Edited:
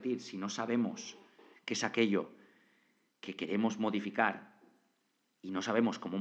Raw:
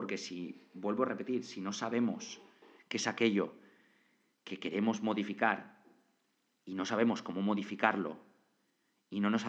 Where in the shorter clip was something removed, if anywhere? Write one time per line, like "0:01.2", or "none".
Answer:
none